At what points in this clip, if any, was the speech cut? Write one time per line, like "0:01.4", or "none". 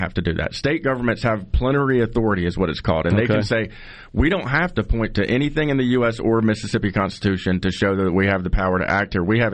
none